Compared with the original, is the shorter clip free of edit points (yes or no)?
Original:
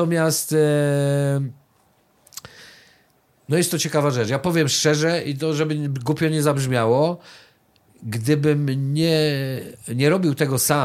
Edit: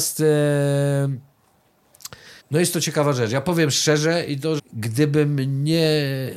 no